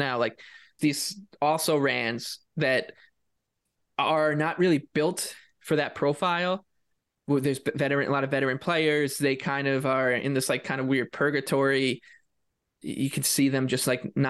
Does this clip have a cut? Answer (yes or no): no